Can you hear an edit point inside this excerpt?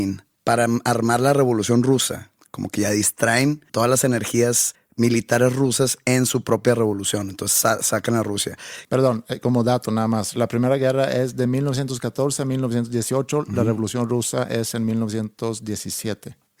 no; 0 cuts

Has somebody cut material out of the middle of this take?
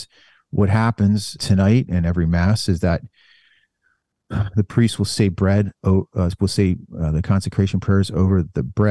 yes; 1 cut; at 1.4 s

